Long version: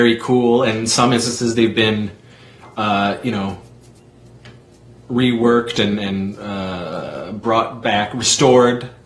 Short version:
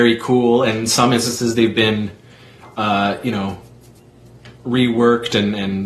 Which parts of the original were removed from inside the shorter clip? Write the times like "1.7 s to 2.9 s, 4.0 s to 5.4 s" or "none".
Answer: 4.5 s to 5.0 s